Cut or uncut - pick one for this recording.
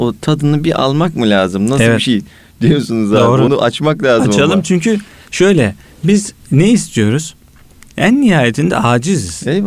uncut